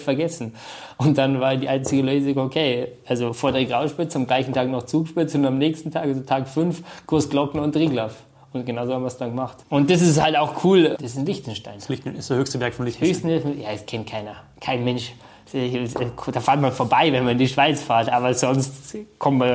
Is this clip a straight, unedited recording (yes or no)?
no